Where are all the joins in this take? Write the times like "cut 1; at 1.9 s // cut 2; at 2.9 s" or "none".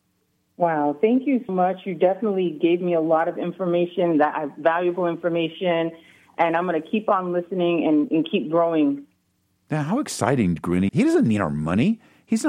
cut 1; at 1.5 s // cut 2; at 10.9 s